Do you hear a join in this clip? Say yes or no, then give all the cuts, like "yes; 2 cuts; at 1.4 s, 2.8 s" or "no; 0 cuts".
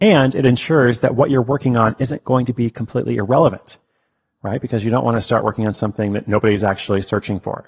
no; 0 cuts